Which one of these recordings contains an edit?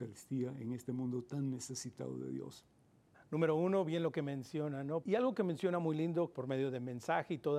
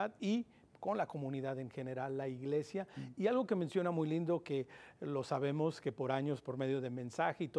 first; 3 cuts; at 3.1 s, 5.0 s, 6.3 s

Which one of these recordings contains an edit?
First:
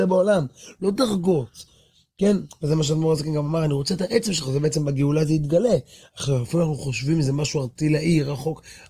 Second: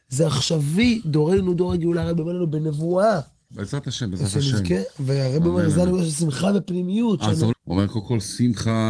second; 2 cuts; at 3.5 s, 7.5 s

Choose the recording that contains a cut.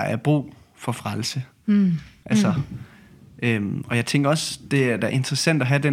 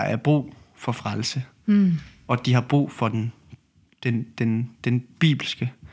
first; 1 cut; at 2.2 s

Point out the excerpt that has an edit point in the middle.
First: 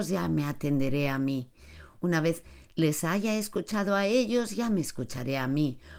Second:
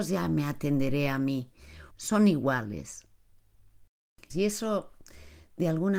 second; 2 cuts; at 1.9 s, 4.3 s

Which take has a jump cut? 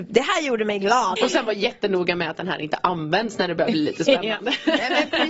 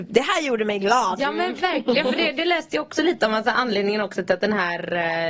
first; 1 cut; at 1.2 s

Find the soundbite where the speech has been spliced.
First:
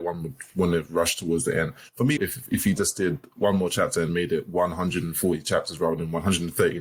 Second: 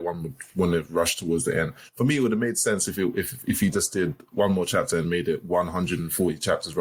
first; 1 cut; at 2.2 s

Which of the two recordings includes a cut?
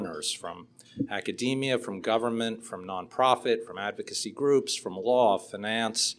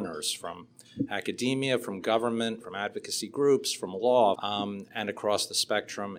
second; 2 cuts; at 2.6 s, 4.4 s

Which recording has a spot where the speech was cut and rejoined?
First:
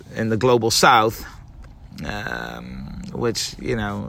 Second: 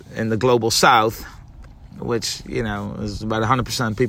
second; 1 cut; at 2.0 s

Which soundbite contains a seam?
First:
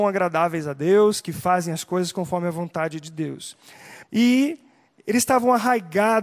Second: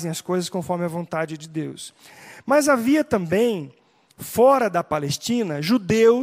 first; 1 cut; at 4.0 s

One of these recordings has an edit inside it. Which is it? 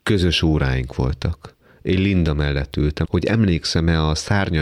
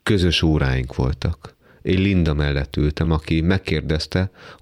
first; 1 cut; at 3.0 s

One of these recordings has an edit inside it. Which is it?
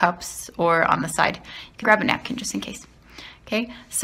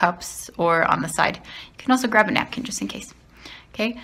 first; 1 cut; at 1.8 s

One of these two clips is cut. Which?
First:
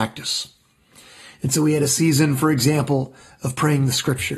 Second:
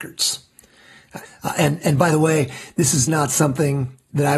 second; 2 cuts; at 1.2 s, 3.1 s

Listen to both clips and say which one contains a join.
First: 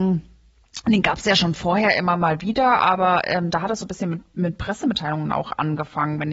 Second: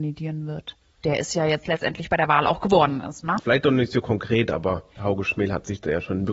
second; 2 cuts; at 3.4 s, 4.9 s

